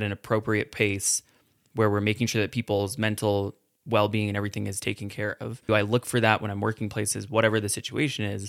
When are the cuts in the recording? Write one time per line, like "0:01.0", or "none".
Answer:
0:05.7